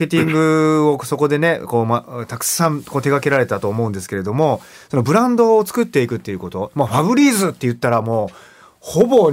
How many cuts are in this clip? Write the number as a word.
zero